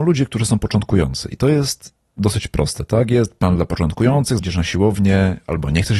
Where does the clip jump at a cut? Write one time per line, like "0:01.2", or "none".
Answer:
0:04.4